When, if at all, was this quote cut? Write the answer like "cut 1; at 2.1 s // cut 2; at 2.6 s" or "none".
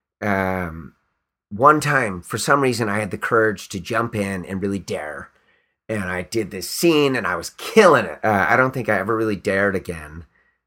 cut 1; at 8.2 s